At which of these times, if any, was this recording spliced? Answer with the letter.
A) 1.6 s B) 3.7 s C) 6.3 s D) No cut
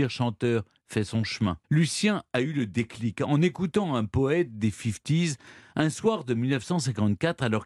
A